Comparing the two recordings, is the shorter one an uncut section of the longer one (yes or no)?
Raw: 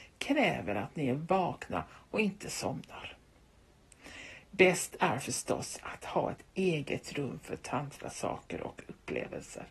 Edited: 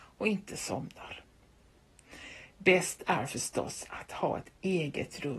yes